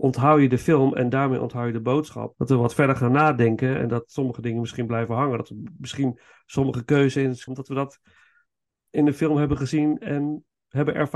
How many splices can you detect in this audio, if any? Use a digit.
2